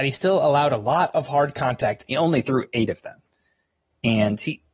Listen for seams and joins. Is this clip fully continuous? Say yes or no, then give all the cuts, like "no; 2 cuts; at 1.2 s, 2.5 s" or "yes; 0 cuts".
no; 1 cut; at 2.1 s